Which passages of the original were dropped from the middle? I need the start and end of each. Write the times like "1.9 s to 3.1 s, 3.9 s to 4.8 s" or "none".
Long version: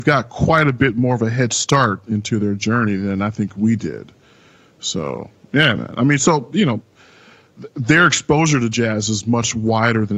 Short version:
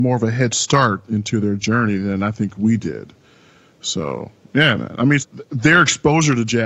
6.2 s to 7.4 s